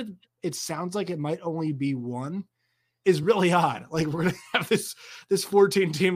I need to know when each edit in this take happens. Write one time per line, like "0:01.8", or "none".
none

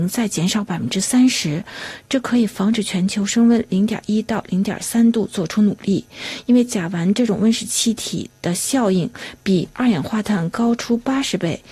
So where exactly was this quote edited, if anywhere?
none

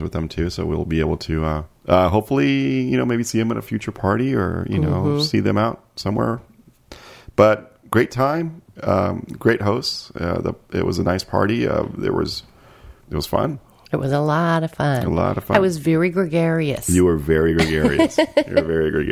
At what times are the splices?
0:01.8
0:13.0

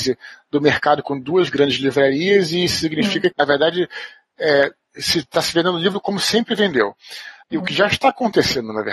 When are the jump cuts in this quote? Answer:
0:03.3
0:07.4

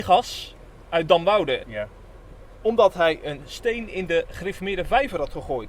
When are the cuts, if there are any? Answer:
0:01.6

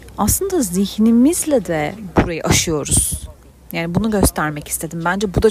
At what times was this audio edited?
none

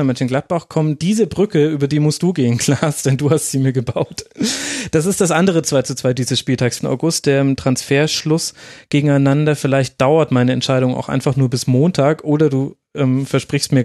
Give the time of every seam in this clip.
0:06.8

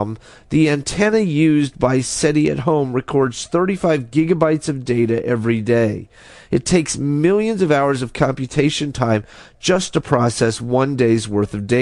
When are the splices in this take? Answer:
none

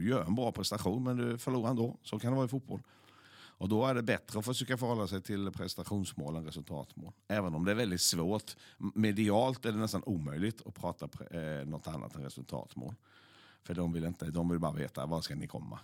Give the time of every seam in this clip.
none

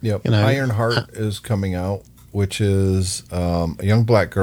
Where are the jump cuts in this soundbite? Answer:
none

